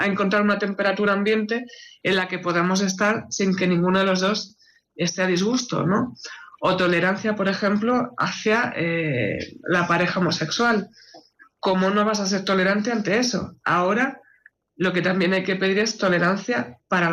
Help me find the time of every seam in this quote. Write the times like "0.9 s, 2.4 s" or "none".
none

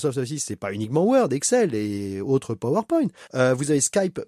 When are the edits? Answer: 3.3 s

